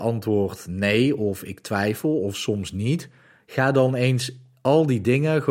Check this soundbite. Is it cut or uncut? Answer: uncut